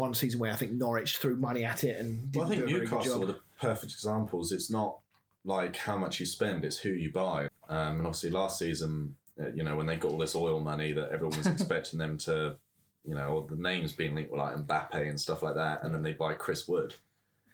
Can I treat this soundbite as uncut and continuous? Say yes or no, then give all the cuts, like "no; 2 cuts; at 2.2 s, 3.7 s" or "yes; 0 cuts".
no; 1 cut; at 7.5 s